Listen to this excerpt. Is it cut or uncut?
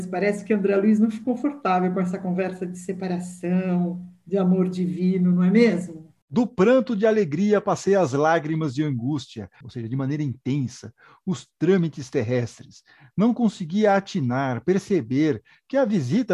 cut